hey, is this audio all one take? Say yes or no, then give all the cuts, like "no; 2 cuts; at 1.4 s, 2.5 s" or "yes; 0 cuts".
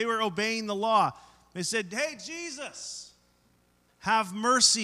no; 1 cut; at 3.9 s